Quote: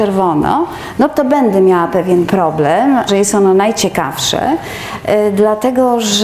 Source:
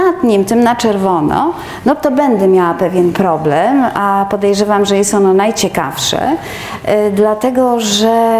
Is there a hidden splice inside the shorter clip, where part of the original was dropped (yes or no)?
yes